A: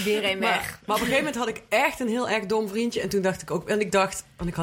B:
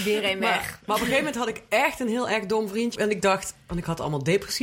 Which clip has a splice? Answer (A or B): B